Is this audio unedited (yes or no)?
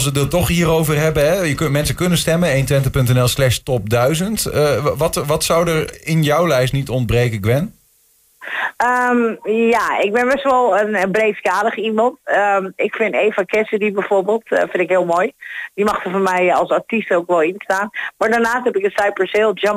yes